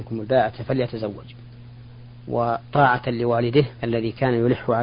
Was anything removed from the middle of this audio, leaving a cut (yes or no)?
yes